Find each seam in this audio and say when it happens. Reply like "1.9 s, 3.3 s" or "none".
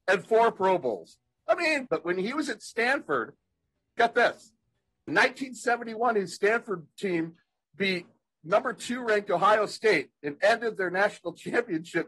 1.9 s